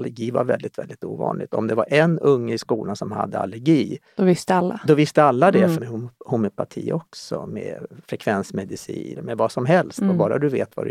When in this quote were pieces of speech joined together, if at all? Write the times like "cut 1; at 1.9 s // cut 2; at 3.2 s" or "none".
cut 1; at 5.7 s // cut 2; at 7.5 s // cut 3; at 9.1 s